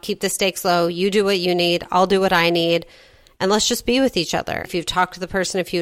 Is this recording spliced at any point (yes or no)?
yes